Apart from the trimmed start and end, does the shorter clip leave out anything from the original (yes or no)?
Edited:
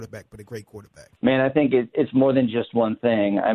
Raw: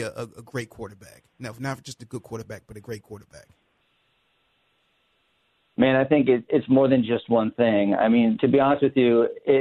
yes